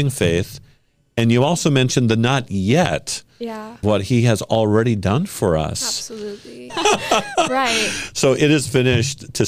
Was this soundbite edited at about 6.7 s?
yes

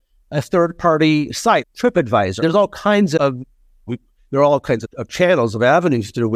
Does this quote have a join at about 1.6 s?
yes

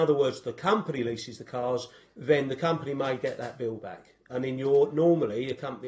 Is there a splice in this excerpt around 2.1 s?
yes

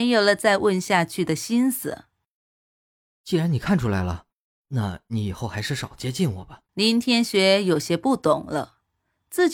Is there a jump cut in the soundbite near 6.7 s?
yes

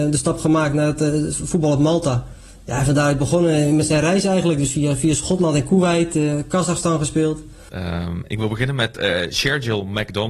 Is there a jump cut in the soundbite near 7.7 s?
yes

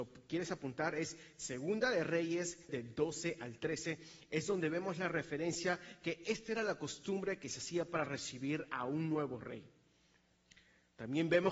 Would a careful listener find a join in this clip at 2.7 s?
yes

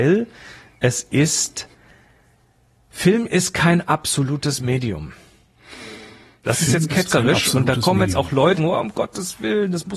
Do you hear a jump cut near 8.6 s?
yes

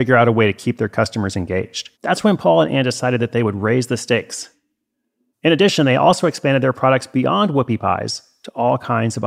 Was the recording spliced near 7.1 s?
no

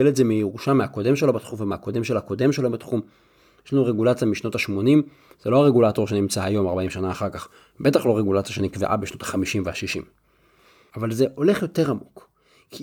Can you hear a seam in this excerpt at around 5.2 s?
no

